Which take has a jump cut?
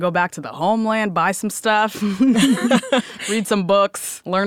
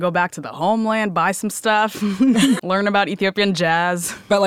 second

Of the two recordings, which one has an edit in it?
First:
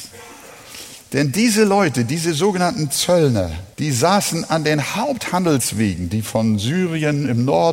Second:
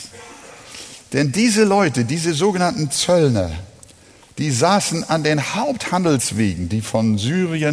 first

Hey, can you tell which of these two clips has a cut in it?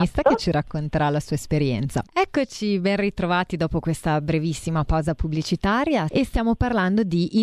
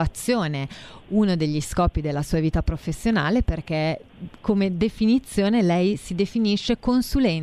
first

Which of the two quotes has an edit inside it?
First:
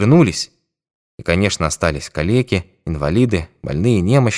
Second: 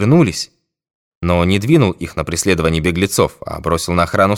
second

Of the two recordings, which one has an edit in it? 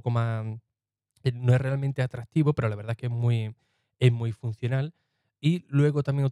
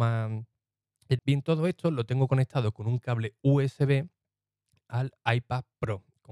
second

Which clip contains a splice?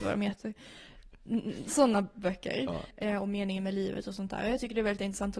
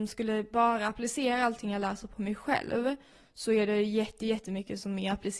first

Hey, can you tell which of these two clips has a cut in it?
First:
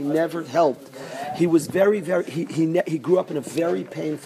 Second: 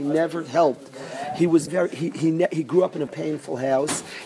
second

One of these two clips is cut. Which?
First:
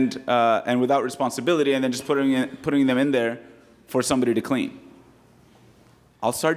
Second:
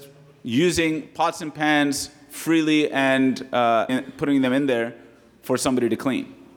second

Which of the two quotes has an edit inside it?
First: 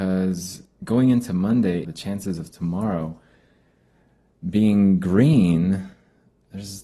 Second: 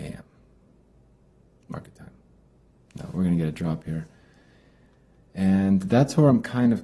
first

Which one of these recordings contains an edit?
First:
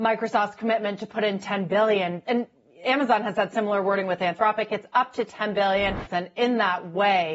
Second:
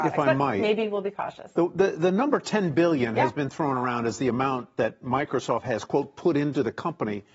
first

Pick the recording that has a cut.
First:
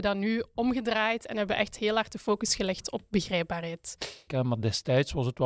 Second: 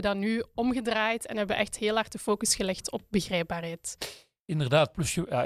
first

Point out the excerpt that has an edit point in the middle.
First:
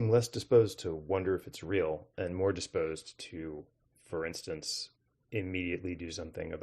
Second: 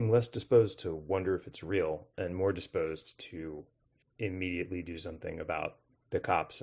second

